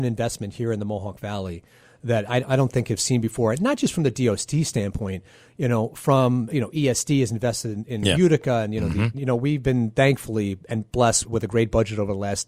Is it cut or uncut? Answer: cut